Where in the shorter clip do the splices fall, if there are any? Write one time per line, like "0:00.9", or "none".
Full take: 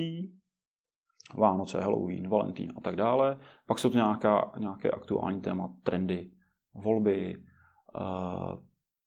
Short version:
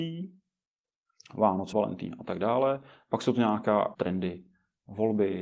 0:01.7
0:03.9